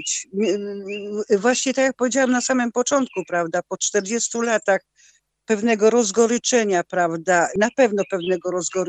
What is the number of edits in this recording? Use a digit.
0